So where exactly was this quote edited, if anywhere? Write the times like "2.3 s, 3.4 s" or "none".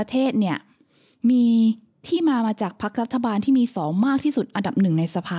3.7 s

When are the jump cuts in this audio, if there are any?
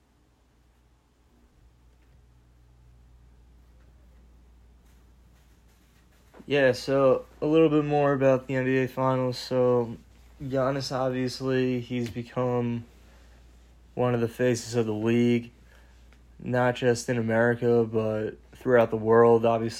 none

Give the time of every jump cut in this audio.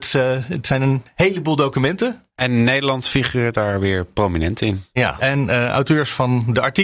5.2 s

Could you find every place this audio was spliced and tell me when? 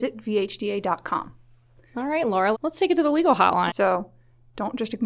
2.5 s, 3.7 s

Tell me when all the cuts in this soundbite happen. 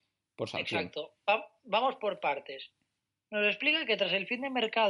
none

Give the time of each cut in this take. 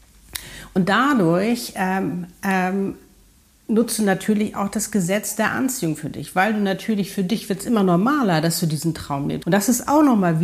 9.4 s

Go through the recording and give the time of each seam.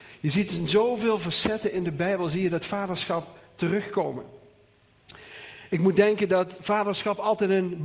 none

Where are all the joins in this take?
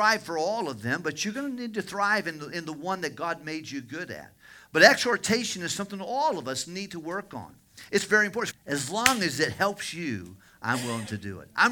8.5 s

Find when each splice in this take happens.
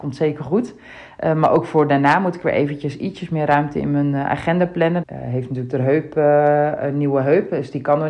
5.0 s

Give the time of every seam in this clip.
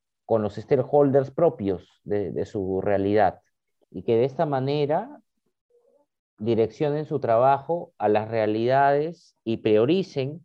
3.8 s

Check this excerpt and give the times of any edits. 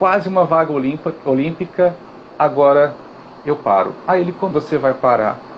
4.5 s

